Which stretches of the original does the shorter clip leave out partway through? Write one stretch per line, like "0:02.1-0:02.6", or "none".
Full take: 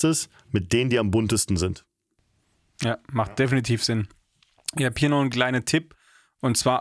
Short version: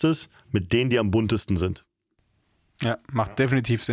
none